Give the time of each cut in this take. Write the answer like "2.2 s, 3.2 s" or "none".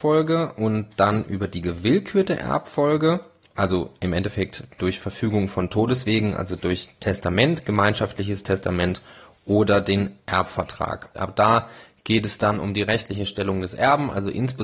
11.1 s